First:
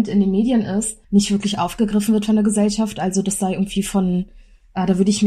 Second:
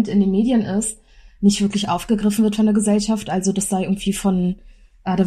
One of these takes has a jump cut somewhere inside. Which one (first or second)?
first